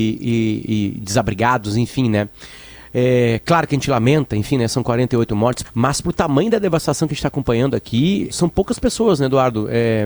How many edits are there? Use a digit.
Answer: 2